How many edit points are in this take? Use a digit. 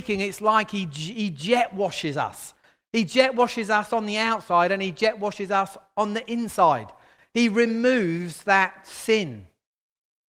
0